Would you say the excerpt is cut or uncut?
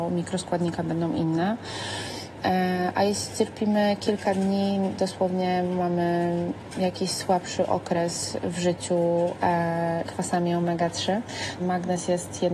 cut